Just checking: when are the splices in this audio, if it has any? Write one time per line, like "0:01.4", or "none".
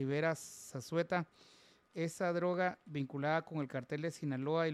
0:01.9